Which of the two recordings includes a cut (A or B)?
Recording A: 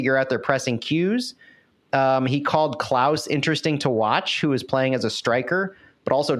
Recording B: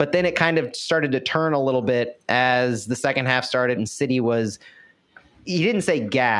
B